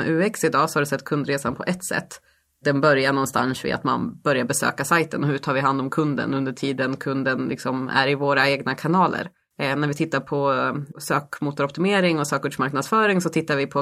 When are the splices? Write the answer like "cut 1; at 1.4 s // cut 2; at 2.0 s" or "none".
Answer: none